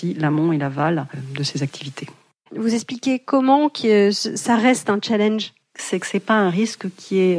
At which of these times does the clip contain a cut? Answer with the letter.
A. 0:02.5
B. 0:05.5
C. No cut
A